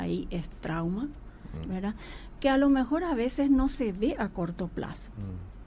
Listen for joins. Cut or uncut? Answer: cut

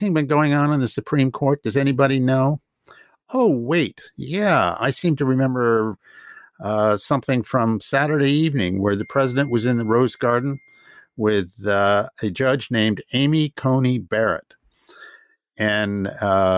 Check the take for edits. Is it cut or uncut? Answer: uncut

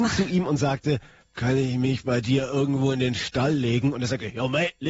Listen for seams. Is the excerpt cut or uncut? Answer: uncut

